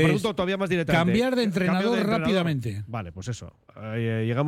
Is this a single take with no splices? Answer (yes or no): yes